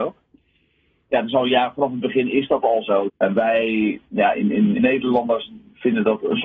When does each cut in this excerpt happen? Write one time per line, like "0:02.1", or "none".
0:03.1
0:04.8